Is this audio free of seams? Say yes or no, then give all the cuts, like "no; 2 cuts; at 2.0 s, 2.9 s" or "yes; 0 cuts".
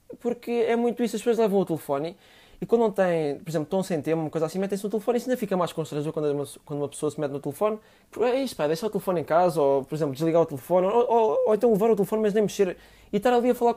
no; 1 cut; at 8.0 s